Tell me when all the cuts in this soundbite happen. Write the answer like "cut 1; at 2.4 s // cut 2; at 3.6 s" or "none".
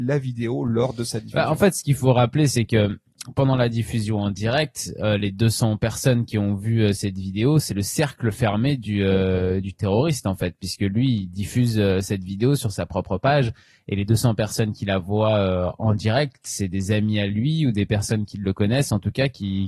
none